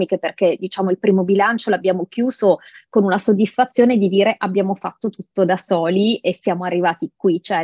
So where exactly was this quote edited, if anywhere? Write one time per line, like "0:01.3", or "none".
none